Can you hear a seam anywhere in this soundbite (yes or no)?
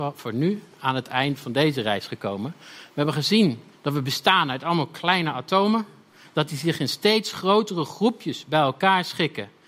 no